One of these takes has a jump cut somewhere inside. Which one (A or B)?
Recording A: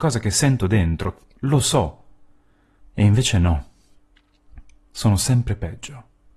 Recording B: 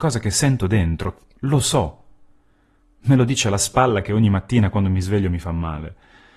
A